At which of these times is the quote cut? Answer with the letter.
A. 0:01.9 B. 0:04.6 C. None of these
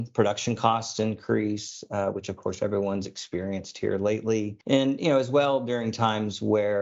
B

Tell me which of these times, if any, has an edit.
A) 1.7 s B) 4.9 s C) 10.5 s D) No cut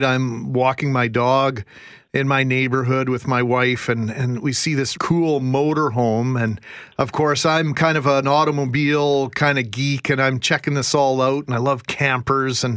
B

